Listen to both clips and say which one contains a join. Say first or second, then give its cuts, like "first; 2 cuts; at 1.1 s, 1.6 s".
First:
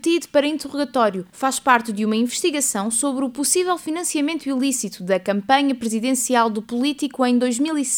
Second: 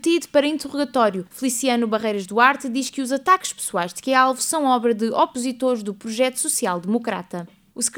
second; 1 cut; at 1.3 s